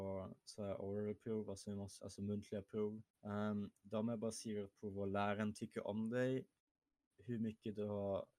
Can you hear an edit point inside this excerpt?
yes; 2 cuts; at 2.0 s, 3.1 s

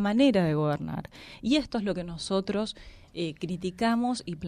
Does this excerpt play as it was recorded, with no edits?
yes; 0 cuts

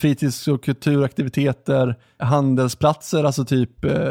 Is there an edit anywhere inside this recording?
yes; 1 cut; at 2.2 s

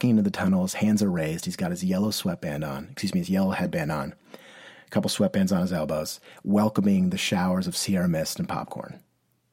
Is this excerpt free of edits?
yes; 0 cuts

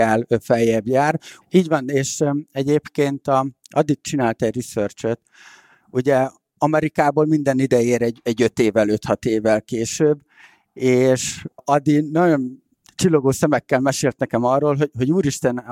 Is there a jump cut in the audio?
yes; 1 cut; at 1.4 s

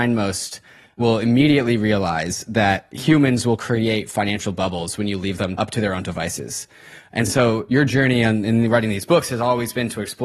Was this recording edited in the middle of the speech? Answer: no; 0 cuts

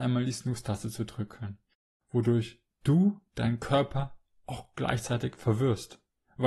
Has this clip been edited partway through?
no; 0 cuts

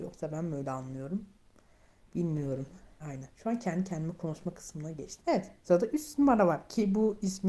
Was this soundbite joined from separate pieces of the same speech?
yes; 2 cuts; at 3.0 s, 5.2 s

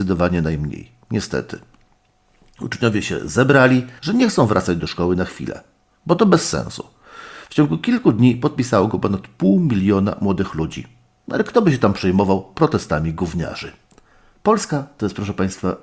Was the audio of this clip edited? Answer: yes; 1 cut; at 4.0 s

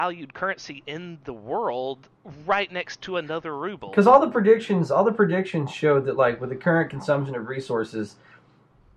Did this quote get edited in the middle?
no; 0 cuts

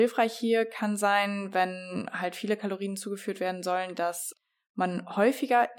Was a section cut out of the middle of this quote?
no; 0 cuts

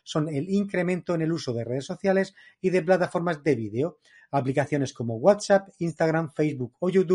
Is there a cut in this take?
no; 0 cuts

